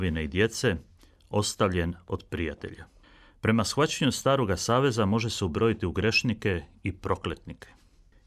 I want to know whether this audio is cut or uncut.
uncut